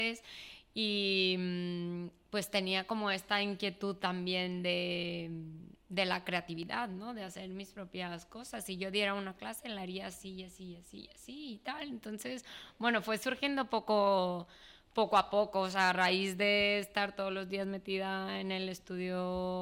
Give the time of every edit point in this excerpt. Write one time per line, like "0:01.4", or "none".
none